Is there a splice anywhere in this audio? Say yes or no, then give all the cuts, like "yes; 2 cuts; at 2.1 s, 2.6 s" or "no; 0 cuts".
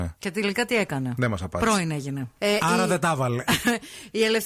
yes; 1 cut; at 2.4 s